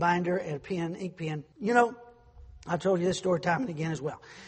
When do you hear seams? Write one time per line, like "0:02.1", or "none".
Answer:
0:01.5